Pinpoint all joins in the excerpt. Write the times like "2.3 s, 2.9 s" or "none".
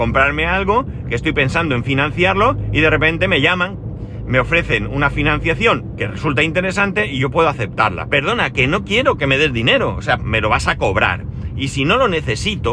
8.1 s, 10.2 s